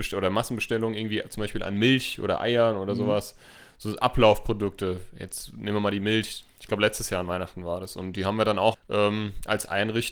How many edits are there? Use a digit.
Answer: 2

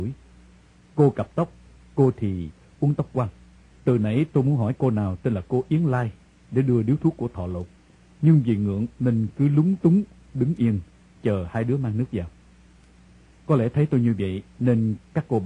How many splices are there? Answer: 1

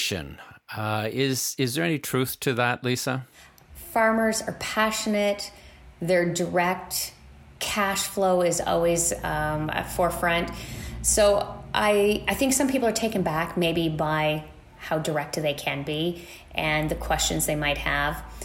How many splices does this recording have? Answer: 0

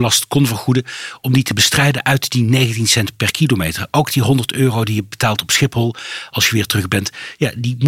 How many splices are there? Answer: 0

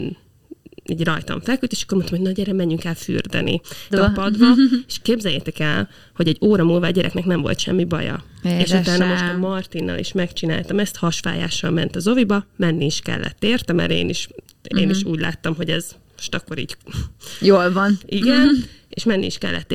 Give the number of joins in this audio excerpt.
1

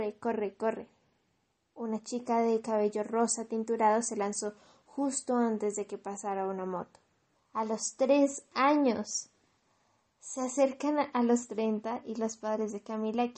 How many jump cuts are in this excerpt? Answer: 1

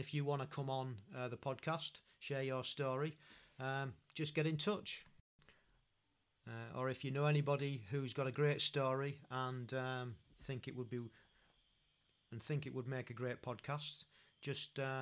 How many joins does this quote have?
0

